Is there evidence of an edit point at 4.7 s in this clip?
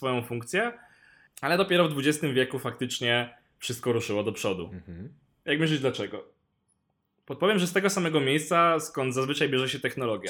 no; 0 cuts

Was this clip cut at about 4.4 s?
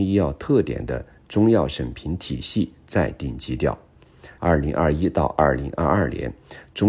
yes; 1 cut; at 4.4 s

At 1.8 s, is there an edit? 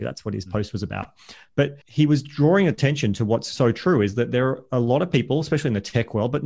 yes; 1 cut; at 1.8 s

